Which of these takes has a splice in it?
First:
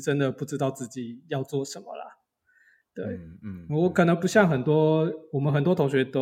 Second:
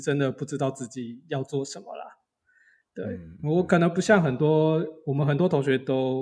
second; 1 cut; at 3.4 s

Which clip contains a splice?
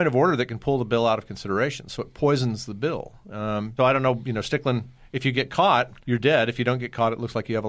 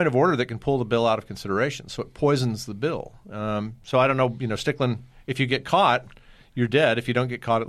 first; 2 cuts; at 3.8 s, 6.0 s

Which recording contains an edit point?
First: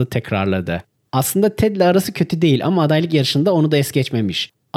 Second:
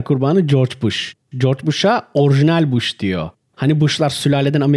first; 1 cut; at 1.0 s

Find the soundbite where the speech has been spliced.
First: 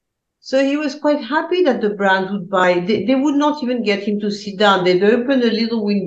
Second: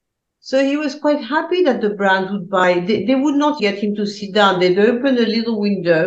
second; 1 cut; at 3.6 s

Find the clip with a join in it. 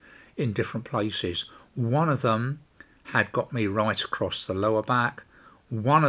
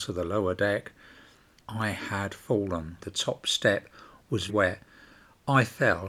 second; 3 cuts; at 1.6 s, 3.0 s, 4.5 s

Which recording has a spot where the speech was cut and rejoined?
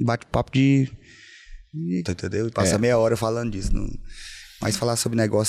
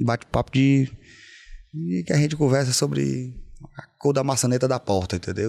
first; 1 cut; at 2.0 s

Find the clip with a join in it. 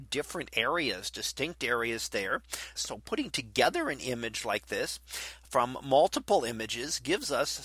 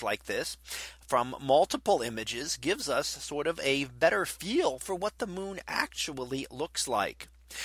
first; 1 cut; at 2.8 s

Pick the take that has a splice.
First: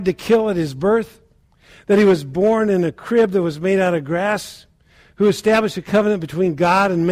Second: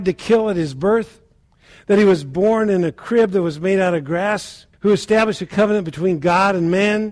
second; 1 cut; at 4.7 s

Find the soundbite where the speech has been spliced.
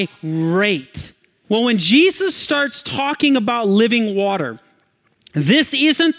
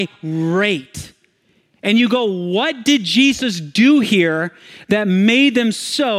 first; 1 cut; at 1.4 s

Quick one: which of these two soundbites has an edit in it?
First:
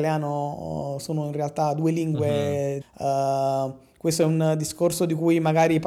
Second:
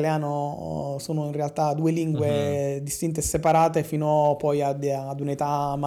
first; 1 cut; at 2.8 s

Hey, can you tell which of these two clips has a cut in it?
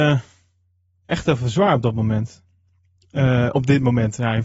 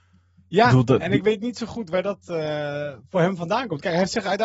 first; 1 cut; at 1.0 s

